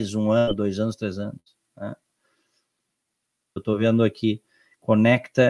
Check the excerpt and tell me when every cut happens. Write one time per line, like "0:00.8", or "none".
0:03.6

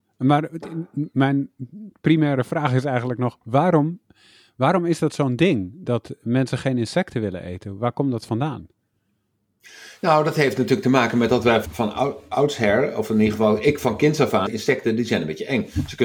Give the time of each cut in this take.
0:11.6
0:14.5

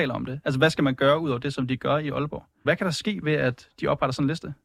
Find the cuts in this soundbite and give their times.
0:02.7

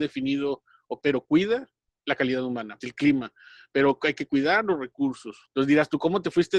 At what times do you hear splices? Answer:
0:01.0
0:02.8
0:05.5

